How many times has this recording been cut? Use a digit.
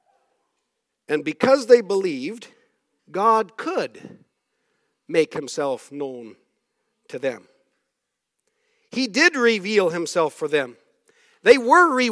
1